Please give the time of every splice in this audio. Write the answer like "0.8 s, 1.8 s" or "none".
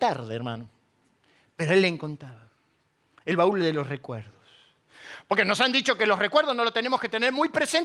none